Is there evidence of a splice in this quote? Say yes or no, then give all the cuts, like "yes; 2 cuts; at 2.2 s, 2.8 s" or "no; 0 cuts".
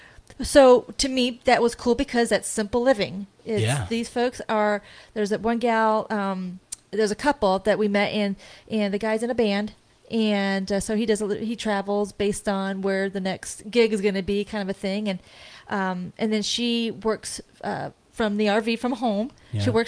no; 0 cuts